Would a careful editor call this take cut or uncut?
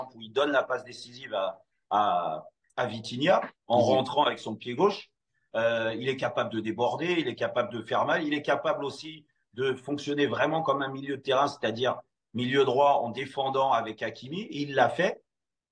uncut